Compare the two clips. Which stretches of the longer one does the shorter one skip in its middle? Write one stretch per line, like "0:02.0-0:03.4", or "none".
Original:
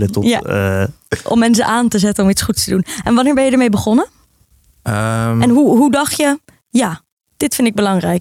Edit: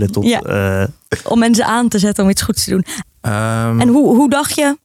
0:03.0-0:04.6